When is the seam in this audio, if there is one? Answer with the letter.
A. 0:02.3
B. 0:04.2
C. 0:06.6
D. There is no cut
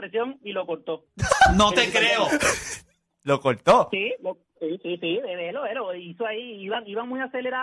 D